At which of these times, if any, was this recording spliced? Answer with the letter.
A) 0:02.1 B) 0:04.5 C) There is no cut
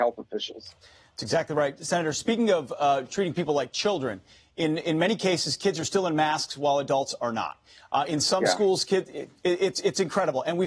C